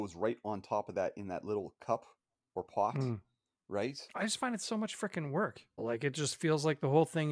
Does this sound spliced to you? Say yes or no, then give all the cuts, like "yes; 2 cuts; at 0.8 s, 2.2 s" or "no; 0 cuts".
yes; 1 cut; at 5.8 s